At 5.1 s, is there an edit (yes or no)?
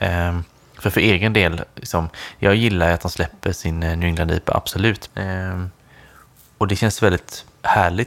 yes